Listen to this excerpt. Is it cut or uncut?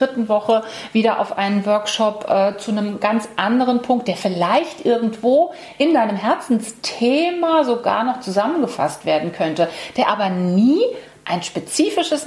uncut